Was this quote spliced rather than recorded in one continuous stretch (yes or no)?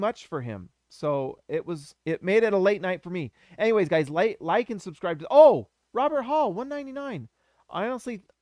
no